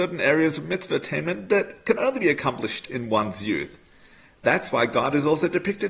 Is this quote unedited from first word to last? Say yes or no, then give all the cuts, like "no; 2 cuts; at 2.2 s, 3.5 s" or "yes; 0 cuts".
yes; 0 cuts